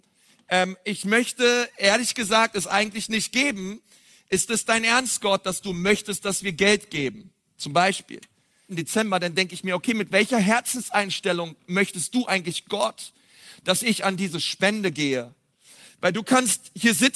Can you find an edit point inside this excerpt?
yes; 1 cut; at 8.7 s

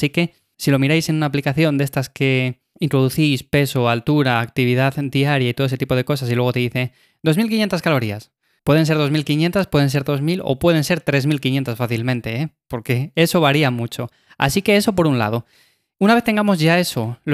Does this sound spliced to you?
no; 0 cuts

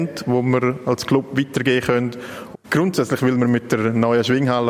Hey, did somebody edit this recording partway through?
yes; 1 cut; at 2.5 s

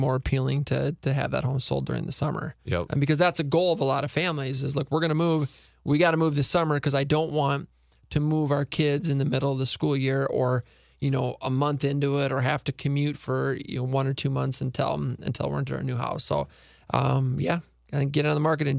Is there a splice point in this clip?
no; 0 cuts

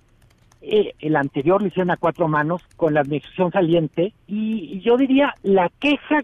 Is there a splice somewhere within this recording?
yes; 3 cuts; at 0.9 s, 2.7 s, 4.2 s

